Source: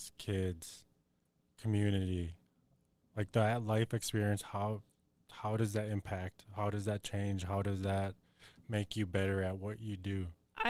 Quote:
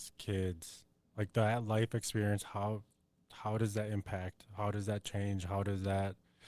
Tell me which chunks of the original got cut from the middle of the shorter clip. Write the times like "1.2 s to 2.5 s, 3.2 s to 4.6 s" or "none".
1.0 s to 3.0 s